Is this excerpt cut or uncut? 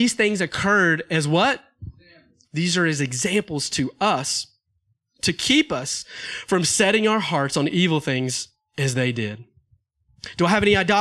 cut